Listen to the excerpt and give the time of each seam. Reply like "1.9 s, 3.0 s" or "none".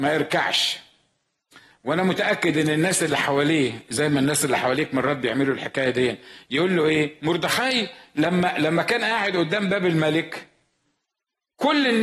7.2 s